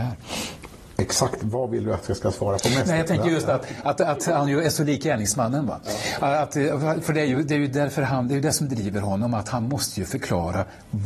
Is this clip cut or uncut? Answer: uncut